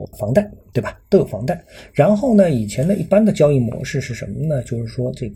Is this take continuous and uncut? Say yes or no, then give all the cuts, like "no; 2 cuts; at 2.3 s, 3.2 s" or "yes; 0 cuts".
yes; 0 cuts